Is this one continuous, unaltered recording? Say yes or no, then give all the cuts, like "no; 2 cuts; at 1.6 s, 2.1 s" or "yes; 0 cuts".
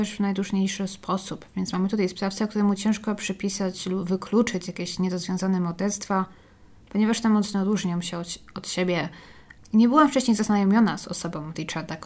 no; 1 cut; at 9.6 s